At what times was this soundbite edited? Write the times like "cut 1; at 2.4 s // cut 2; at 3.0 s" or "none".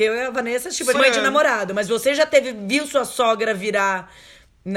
cut 1; at 0.9 s